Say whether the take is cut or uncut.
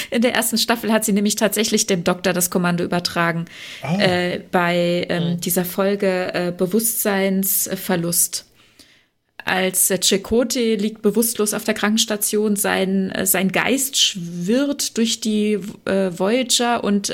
uncut